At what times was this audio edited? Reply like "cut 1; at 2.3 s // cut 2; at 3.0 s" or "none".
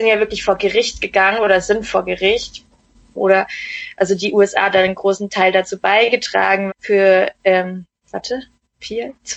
cut 1; at 3.2 s // cut 2; at 6.7 s // cut 3; at 8.1 s